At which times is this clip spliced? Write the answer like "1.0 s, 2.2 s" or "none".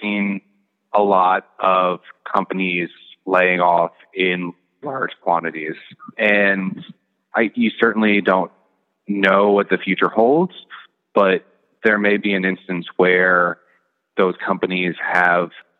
4.8 s